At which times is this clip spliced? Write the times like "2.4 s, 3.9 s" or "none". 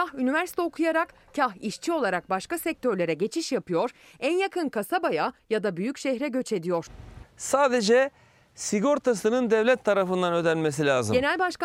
7.2 s